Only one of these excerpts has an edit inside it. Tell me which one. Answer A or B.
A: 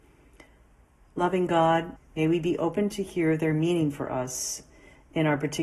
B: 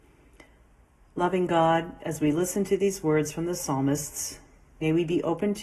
A